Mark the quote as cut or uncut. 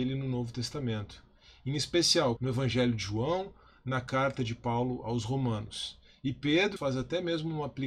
cut